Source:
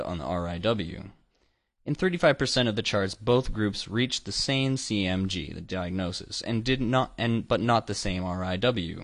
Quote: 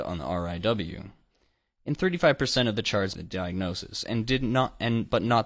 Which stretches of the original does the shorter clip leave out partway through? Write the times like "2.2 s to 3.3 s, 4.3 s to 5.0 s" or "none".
3.2 s to 5.5 s